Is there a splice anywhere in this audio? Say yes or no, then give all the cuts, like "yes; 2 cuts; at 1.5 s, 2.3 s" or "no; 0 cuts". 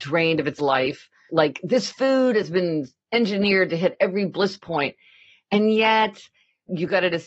yes; 1 cut; at 1.3 s